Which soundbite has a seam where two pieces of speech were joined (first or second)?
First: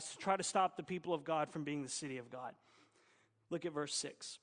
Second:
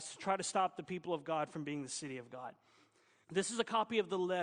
second